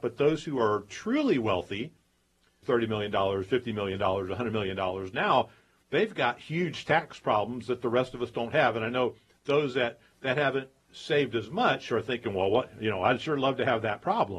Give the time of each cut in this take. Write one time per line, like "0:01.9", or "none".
0:02.6